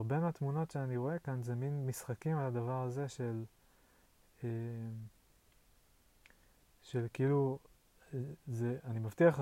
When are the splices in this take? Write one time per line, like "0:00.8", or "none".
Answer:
none